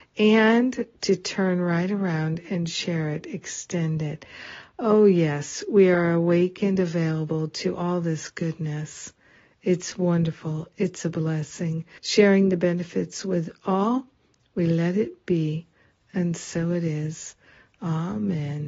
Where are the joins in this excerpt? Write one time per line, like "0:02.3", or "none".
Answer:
0:12.0